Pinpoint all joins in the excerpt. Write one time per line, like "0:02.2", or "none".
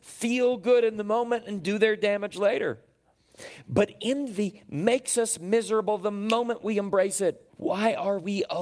0:07.5